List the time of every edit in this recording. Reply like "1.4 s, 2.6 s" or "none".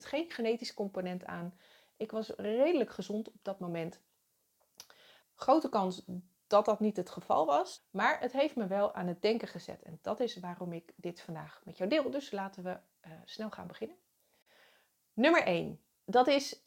5.2 s, 7.8 s